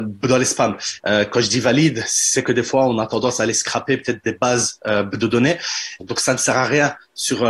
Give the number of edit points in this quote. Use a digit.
2